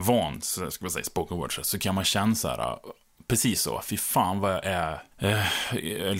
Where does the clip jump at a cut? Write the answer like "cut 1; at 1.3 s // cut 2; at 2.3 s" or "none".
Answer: cut 1; at 5.1 s